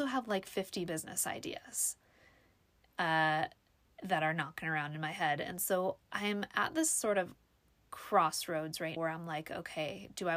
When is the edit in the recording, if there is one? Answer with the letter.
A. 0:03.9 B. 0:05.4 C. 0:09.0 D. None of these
C